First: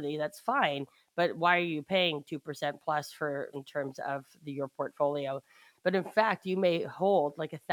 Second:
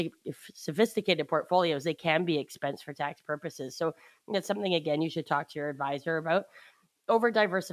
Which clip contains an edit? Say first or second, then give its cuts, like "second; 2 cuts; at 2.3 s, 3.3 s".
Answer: first; 2 cuts; at 3.5 s, 5.7 s